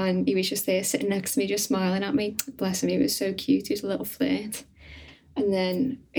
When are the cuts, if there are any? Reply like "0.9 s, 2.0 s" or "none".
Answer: none

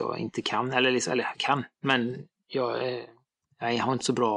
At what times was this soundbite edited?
none

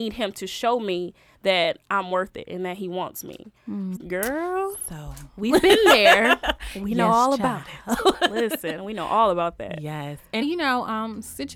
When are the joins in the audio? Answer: 4.0 s, 10.4 s

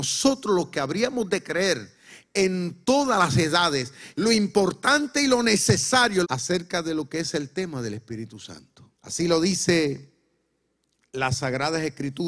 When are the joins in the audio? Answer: 4.1 s, 6.2 s, 8.9 s

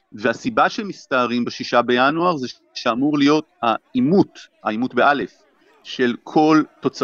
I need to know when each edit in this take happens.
none

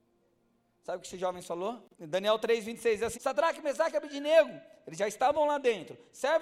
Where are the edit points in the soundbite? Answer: 1.9 s, 3.1 s

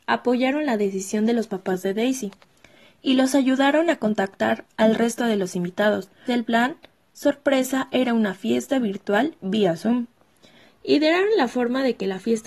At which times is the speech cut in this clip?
6.3 s, 10.7 s

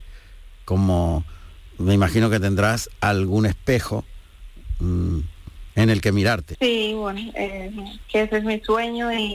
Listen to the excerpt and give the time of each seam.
6.5 s, 8.0 s

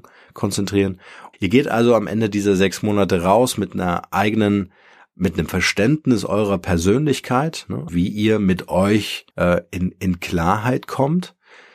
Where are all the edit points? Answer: 1.3 s, 7.9 s, 9.3 s

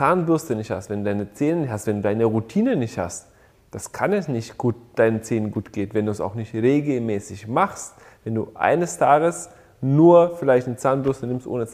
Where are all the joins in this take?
none

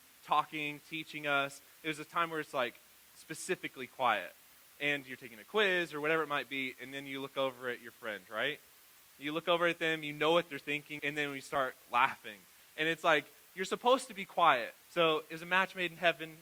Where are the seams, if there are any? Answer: 11.0 s, 14.8 s

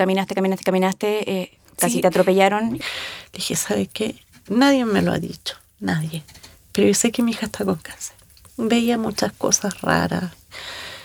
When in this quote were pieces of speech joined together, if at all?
2.8 s

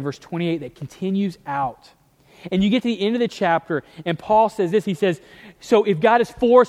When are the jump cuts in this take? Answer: none

